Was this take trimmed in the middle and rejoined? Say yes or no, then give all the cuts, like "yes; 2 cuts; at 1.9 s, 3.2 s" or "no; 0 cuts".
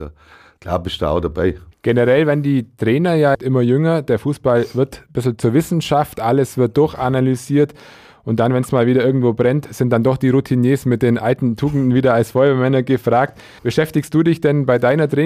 no; 0 cuts